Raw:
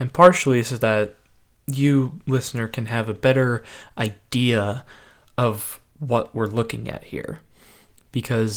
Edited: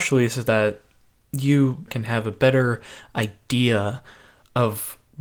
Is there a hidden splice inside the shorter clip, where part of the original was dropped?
yes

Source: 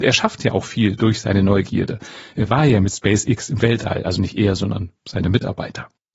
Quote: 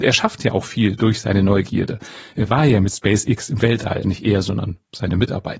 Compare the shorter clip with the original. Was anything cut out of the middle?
yes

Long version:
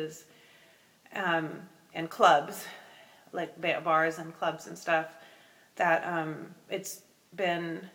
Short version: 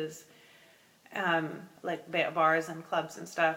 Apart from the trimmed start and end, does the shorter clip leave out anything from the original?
yes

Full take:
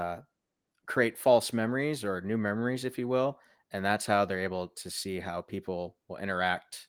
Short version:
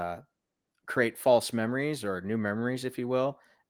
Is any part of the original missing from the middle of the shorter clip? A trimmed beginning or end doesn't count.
no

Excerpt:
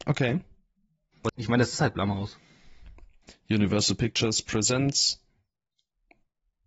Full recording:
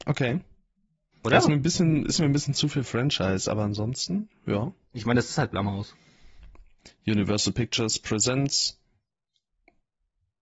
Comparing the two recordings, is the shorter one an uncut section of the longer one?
no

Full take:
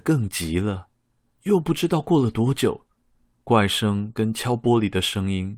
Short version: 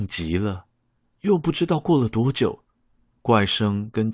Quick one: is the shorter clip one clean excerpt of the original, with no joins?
yes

